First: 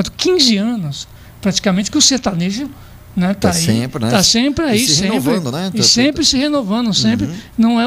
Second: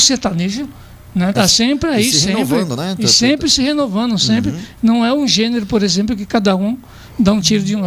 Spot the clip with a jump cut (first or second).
second